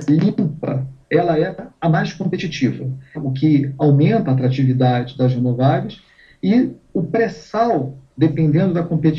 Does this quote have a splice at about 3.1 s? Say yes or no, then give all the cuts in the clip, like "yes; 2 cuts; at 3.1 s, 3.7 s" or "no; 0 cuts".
yes; 1 cut; at 3.1 s